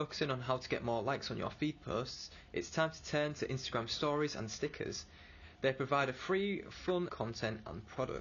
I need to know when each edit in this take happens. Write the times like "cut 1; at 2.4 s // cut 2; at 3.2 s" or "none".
cut 1; at 7.1 s